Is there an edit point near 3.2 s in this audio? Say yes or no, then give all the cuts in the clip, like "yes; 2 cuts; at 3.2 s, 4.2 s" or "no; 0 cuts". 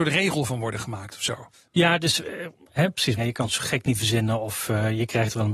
yes; 1 cut; at 3.2 s